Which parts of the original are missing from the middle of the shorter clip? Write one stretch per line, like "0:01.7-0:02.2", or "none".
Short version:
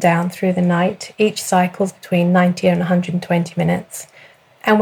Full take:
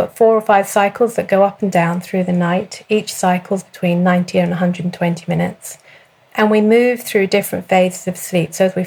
none

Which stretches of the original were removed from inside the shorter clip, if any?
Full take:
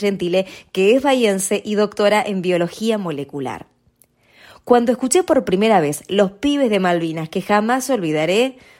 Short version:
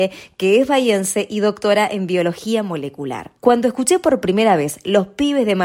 0:03.7-0:04.6

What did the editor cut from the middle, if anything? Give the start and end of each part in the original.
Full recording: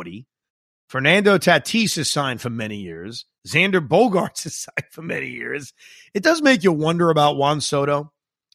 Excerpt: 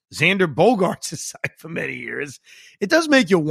none

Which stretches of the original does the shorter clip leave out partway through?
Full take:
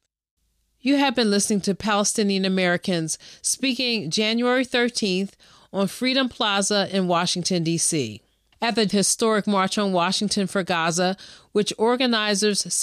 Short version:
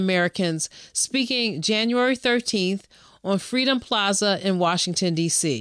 none

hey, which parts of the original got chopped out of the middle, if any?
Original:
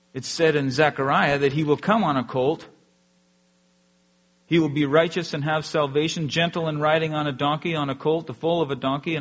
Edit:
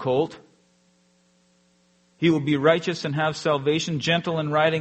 none

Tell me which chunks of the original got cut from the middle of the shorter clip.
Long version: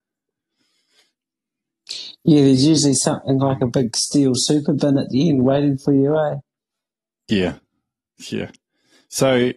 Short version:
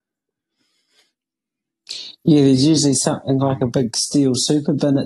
none

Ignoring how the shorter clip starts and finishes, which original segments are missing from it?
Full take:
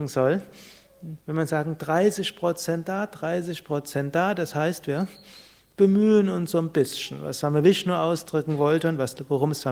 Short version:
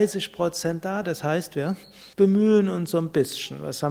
0:03.1-0:04.3
0:05.4-0:05.7

